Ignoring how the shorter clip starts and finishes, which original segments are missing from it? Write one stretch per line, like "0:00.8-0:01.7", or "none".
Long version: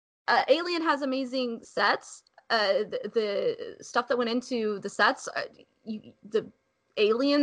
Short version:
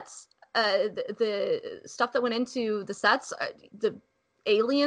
0:05.7-0:06.2